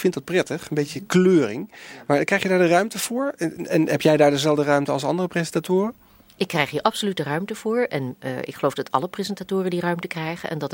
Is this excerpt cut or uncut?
uncut